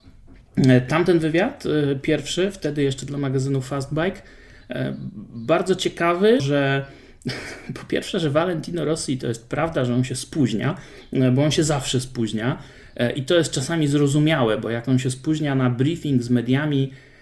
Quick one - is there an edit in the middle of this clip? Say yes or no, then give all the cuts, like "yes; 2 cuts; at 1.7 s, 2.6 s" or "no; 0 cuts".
yes; 1 cut; at 6.4 s